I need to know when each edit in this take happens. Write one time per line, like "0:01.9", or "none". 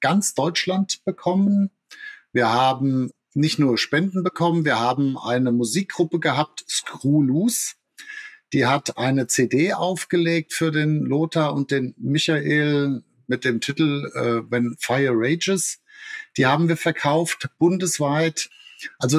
none